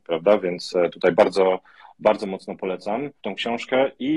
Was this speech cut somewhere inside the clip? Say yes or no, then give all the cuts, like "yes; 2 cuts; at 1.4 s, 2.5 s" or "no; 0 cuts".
yes; 1 cut; at 3.2 s